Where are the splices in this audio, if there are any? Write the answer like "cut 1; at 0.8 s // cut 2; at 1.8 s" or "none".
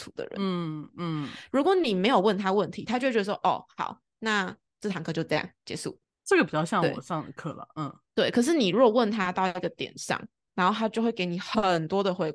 none